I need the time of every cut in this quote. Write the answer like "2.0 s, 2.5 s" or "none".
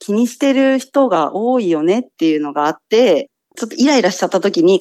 none